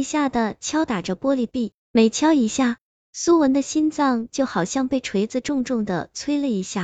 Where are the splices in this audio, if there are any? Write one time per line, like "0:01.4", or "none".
none